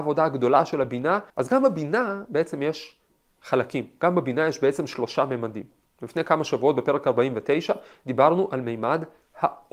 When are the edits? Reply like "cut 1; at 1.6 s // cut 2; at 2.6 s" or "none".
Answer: cut 1; at 1.3 s